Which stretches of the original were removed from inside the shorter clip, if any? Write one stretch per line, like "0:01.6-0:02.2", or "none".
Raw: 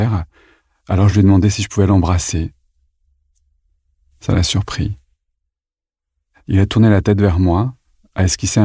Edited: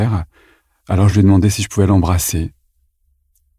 none